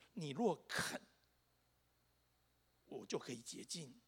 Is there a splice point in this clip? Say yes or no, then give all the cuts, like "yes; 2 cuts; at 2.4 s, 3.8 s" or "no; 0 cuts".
no; 0 cuts